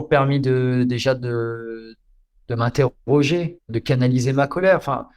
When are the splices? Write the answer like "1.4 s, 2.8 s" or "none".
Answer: 3.7 s